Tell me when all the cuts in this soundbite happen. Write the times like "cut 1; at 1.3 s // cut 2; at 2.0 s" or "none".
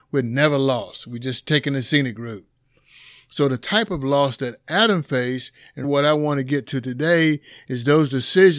cut 1; at 5.8 s